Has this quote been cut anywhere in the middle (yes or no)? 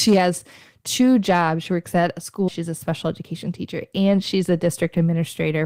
yes